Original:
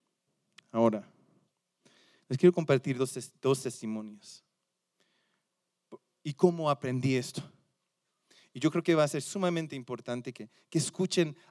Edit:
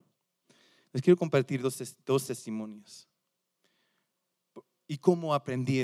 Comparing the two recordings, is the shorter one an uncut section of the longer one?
yes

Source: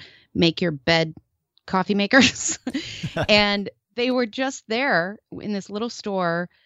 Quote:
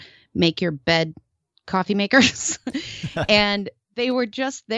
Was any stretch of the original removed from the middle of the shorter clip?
no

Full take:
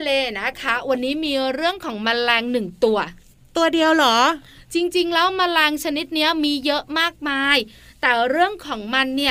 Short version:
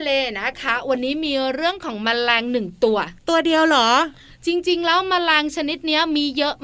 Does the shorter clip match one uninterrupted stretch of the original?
no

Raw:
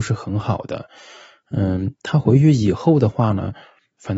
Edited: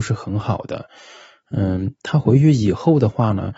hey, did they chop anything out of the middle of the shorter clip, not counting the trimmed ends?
no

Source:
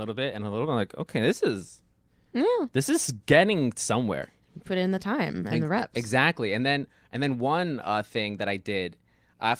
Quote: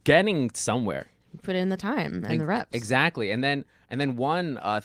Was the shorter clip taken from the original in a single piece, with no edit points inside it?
yes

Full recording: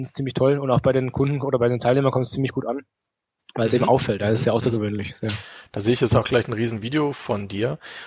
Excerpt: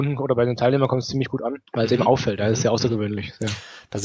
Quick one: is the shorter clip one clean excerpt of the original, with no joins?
no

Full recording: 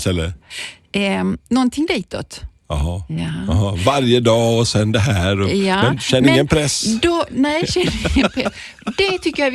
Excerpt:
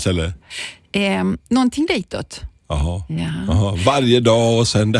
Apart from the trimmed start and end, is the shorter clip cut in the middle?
no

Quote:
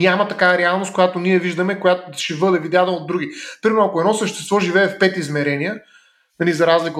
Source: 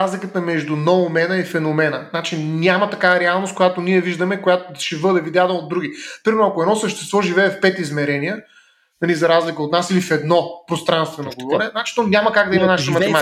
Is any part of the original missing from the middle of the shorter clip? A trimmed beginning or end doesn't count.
no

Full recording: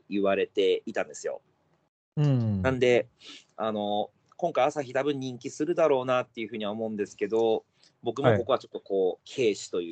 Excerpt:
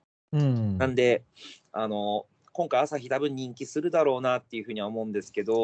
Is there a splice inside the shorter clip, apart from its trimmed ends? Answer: no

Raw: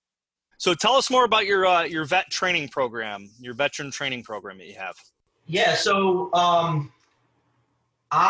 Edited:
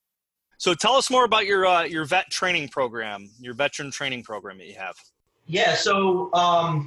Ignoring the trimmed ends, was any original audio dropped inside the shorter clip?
no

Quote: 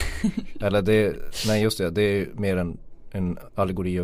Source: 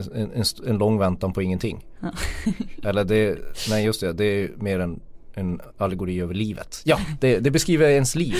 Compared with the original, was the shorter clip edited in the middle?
no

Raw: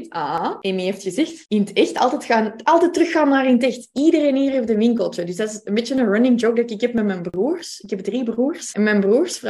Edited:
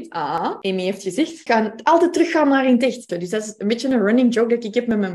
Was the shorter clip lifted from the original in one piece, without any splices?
no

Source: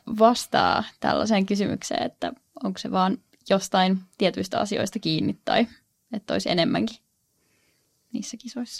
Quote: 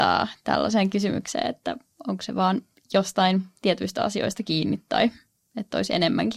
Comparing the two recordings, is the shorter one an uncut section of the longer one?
yes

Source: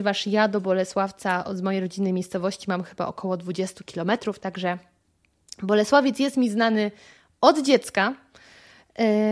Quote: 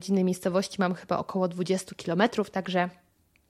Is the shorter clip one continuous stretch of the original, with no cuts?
yes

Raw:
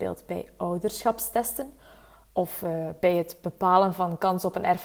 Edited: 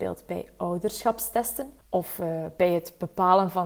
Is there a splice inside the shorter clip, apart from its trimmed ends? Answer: yes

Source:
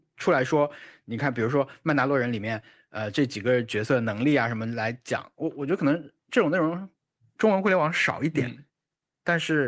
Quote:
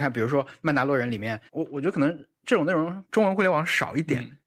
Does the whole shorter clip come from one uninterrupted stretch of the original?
no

